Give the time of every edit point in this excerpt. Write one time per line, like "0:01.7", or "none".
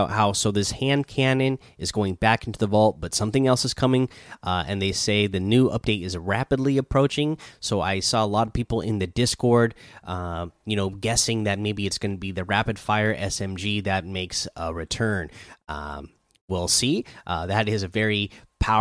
none